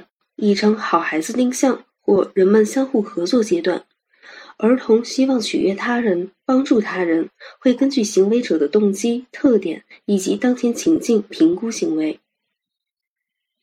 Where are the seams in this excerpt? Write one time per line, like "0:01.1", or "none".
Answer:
none